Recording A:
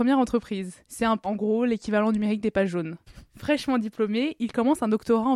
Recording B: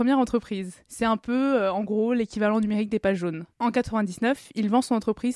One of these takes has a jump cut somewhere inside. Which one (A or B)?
A